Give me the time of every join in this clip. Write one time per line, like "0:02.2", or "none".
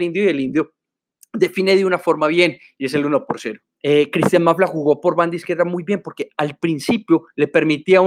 0:03.8